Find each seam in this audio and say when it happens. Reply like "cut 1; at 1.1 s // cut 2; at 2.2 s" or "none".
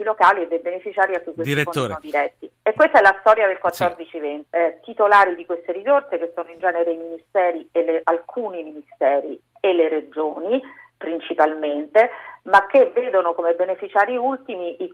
cut 1; at 4.5 s